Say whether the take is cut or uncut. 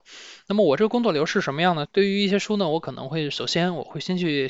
cut